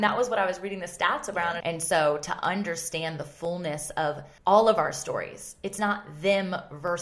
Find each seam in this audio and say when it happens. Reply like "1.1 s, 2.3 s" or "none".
1.6 s, 4.4 s